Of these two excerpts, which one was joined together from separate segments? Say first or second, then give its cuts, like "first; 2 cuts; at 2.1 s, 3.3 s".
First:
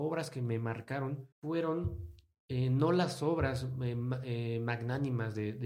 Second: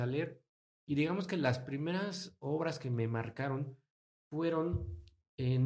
first; 1 cut; at 1.3 s